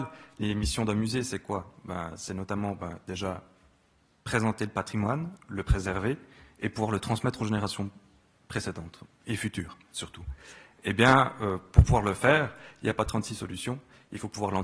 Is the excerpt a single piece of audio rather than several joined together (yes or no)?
yes